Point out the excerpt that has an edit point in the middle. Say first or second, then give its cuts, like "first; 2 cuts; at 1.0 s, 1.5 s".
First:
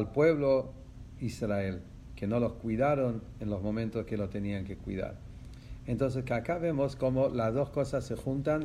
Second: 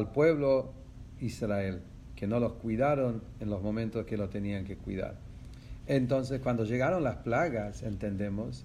second; 1 cut; at 5.8 s